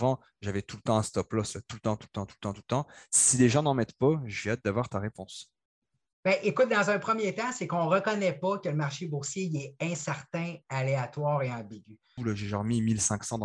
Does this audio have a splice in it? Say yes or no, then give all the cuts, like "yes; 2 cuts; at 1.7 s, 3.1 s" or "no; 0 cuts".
yes; 1 cut; at 12.2 s